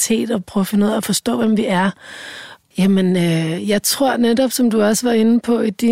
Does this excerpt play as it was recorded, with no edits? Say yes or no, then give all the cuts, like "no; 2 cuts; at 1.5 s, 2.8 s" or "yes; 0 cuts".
no; 1 cut; at 2.6 s